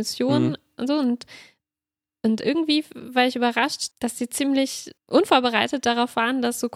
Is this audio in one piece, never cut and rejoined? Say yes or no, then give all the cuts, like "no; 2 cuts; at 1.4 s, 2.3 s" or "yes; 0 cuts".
no; 2 cuts; at 3.9 s, 5.0 s